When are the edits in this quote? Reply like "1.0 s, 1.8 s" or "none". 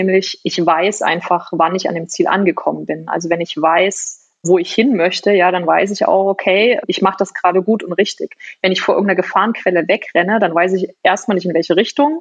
none